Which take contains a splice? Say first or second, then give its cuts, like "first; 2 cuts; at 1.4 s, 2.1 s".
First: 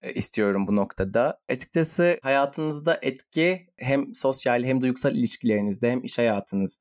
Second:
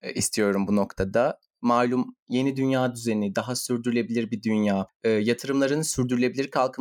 first; 1 cut; at 1.4 s